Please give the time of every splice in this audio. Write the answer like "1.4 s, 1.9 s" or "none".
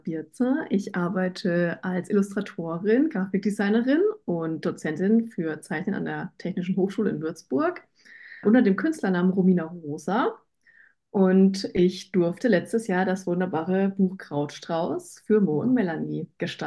8.4 s

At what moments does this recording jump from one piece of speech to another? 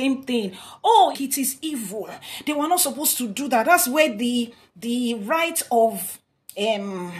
1.1 s

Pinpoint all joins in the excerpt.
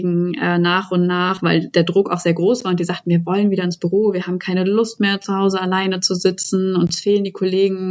none

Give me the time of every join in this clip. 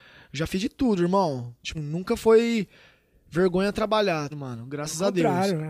1.7 s, 4.3 s

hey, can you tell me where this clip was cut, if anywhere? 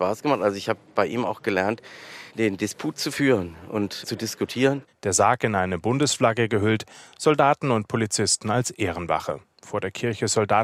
none

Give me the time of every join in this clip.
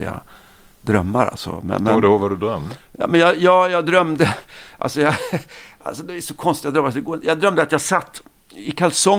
none

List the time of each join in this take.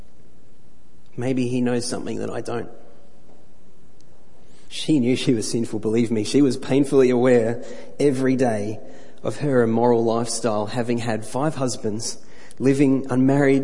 4.7 s

